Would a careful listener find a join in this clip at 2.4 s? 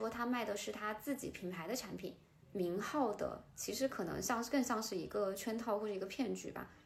yes; 1 cut; at 2.4 s

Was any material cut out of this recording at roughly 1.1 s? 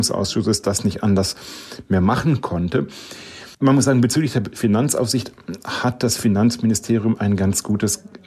no; 1 cut; at 3.5 s

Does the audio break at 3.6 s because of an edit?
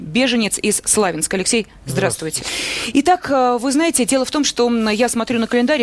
no; 1 cut; at 2.4 s

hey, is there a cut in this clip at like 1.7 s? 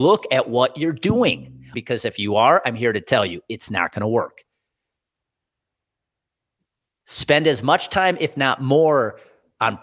yes; 1 cut; at 1.7 s

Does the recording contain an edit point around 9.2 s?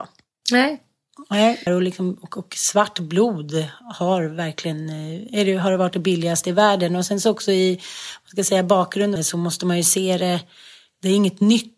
yes; 2 cuts; at 1.7 s, 9.2 s

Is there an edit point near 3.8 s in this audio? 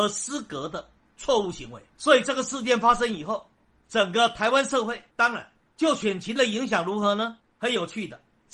no; 1 cut; at 5.1 s

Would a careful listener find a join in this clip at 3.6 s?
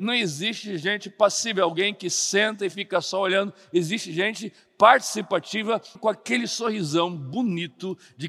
no; 1 cut; at 6.0 s

